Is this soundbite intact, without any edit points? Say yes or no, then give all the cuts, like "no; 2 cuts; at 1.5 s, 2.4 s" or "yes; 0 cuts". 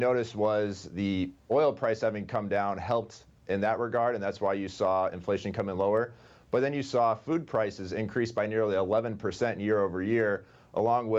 yes; 0 cuts